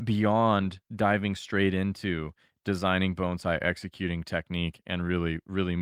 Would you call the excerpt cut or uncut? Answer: uncut